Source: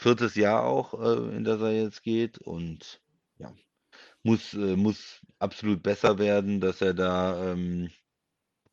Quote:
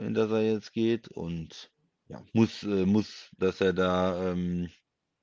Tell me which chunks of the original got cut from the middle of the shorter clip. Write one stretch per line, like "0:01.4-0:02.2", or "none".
0:03.6-0:04.2
0:05.3-0:06.6